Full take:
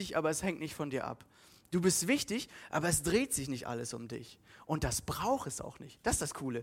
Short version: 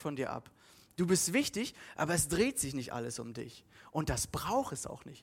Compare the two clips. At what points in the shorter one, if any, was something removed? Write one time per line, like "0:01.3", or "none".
none